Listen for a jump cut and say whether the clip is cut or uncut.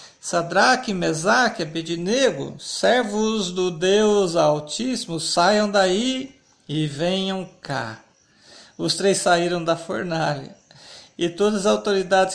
uncut